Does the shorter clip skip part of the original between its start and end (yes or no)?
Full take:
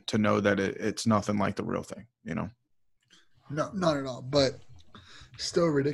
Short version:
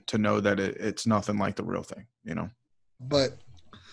yes